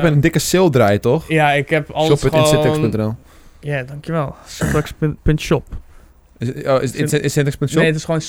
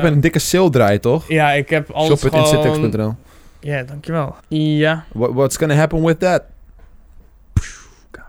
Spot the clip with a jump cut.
second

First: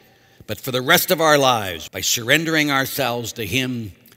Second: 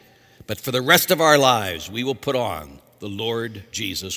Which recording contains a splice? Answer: first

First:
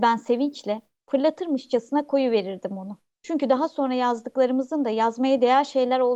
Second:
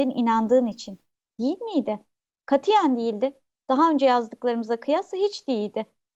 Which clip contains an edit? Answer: first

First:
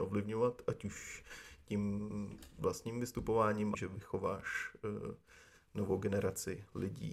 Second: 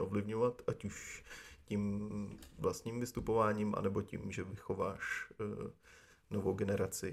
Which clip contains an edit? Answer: first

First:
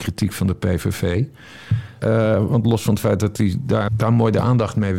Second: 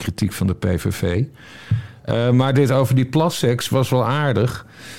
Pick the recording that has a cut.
first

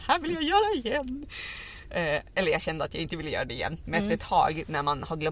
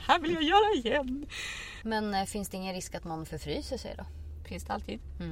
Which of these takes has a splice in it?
second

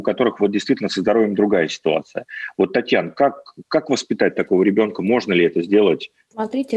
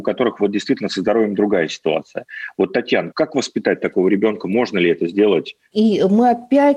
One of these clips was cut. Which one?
second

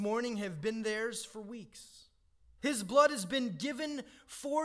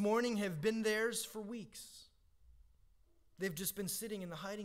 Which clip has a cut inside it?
first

